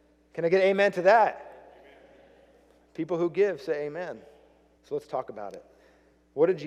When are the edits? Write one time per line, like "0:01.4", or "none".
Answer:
0:04.8